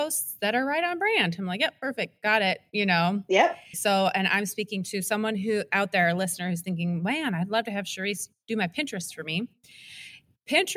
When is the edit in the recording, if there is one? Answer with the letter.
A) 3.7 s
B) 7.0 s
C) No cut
A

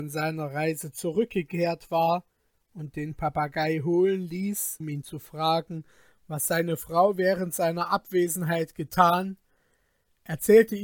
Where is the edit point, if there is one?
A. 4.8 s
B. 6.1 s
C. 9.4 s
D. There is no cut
A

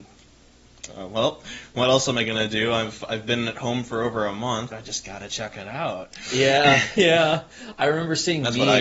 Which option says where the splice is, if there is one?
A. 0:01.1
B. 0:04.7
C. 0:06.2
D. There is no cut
B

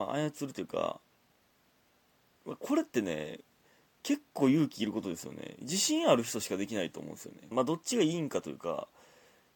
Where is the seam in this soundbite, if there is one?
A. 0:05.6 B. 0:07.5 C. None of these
B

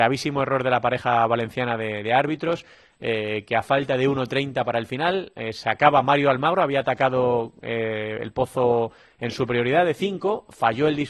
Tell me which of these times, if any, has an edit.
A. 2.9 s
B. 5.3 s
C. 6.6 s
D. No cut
D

